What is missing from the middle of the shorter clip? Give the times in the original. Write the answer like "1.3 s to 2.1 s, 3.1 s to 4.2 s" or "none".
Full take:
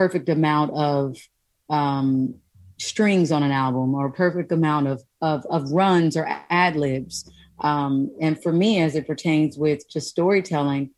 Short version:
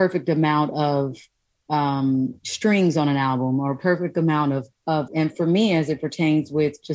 2.4 s to 2.7 s, 5.4 s to 8.1 s